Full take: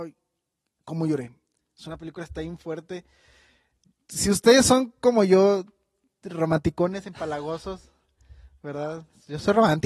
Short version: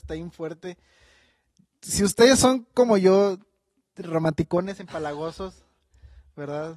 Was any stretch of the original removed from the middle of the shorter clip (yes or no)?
no